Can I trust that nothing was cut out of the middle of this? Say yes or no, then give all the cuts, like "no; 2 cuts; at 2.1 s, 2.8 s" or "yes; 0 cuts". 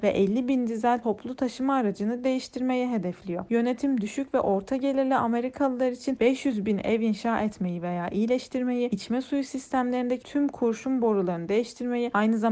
yes; 0 cuts